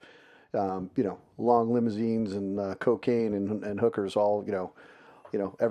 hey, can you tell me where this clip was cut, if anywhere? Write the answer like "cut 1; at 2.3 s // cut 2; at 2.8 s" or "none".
none